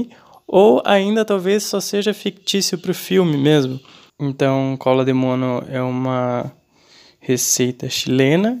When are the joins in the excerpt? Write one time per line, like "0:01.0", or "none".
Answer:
0:04.1